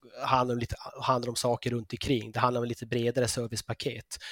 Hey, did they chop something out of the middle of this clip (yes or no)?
no